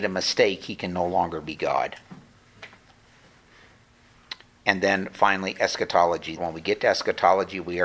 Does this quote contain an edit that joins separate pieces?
yes; 1 cut; at 6.4 s

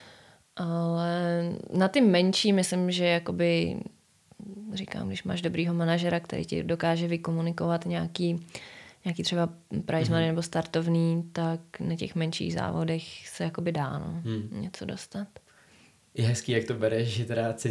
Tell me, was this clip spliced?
no; 0 cuts

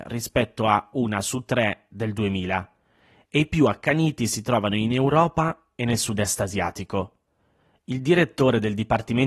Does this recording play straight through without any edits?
yes; 0 cuts

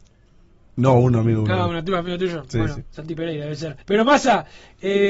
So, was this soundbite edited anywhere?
yes; 1 cut; at 3.8 s

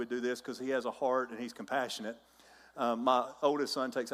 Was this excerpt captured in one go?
yes; 0 cuts

